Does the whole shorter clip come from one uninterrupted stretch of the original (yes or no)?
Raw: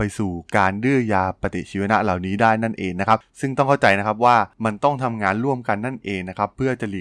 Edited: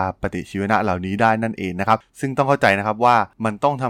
yes